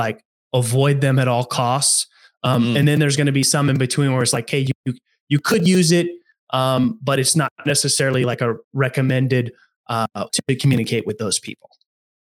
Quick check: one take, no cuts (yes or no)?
no